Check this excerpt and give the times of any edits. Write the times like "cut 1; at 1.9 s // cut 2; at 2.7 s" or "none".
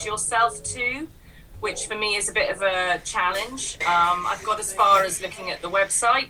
cut 1; at 3.8 s